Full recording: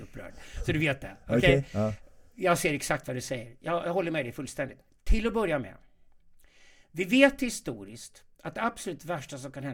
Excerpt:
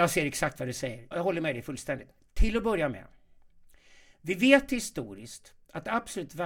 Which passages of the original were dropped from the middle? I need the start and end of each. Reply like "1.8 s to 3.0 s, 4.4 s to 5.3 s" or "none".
3.6 s to 3.8 s

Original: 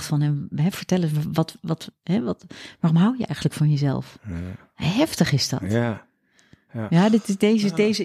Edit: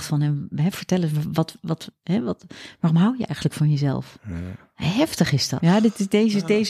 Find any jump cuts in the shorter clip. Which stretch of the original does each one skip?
5.6 s to 6.9 s

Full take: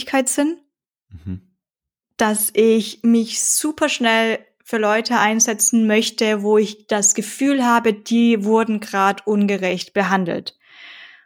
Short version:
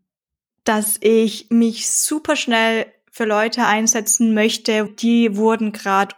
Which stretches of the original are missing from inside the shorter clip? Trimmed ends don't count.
6.4 s to 7.9 s

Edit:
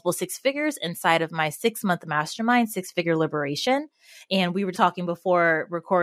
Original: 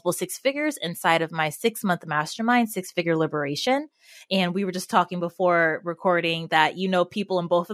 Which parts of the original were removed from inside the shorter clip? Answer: 4.7 s to 4.9 s

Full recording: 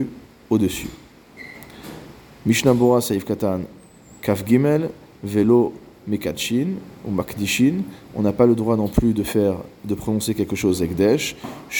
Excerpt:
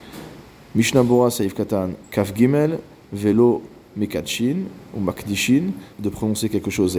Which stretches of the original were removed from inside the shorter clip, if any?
3.7 s to 4.1 s, 8.0 s to 9.8 s

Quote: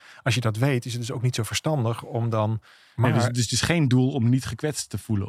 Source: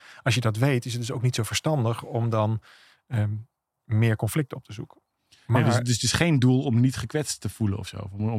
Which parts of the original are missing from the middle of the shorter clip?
2.9 s to 5.5 s

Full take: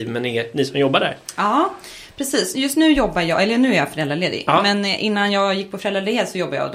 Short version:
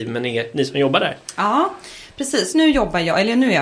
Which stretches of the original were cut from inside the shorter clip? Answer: 2.5 s to 2.7 s

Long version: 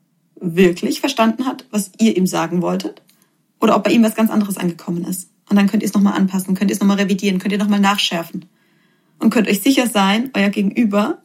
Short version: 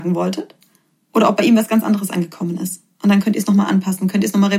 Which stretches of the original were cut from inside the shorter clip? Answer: none

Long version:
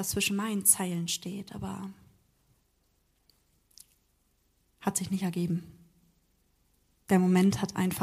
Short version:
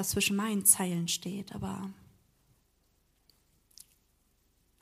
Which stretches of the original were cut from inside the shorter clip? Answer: none

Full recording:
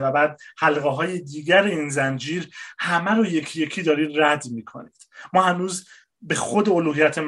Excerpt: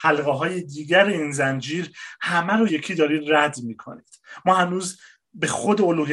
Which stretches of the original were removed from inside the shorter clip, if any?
3.3 s to 3.6 s

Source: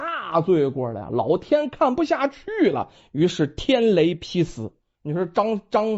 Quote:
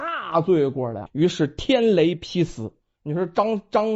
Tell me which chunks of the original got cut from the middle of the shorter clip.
1.1 s to 3.1 s

